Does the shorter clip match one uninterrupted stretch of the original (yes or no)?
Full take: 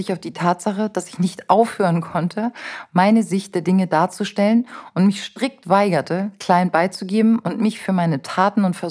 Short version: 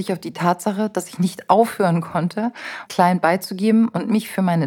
no